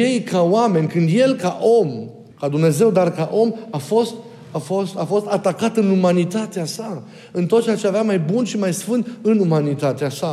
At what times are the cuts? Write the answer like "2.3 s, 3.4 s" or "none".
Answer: 2.3 s